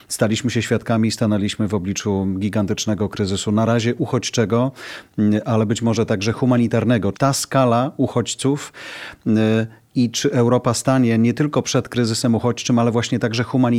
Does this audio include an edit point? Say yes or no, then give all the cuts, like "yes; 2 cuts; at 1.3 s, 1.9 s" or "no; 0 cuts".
yes; 1 cut; at 7.1 s